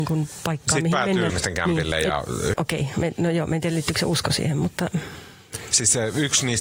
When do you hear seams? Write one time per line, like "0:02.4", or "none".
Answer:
0:01.3
0:02.5